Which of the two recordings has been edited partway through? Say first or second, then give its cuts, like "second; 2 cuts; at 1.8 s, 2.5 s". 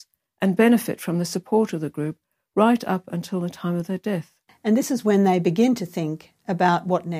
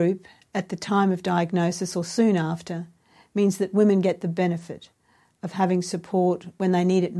first; 1 cut; at 4.5 s